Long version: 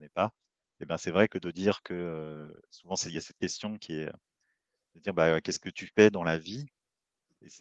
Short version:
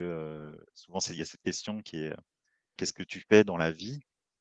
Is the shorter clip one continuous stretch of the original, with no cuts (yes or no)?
no